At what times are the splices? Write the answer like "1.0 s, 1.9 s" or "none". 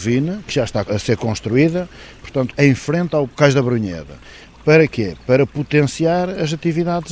2.5 s